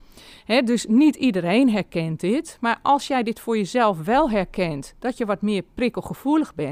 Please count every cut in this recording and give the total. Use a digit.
0